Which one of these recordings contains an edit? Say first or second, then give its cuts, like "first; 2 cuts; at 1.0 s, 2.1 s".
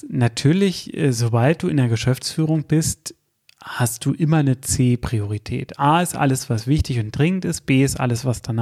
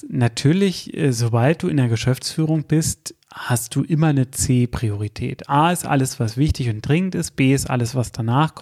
second; 1 cut; at 3.2 s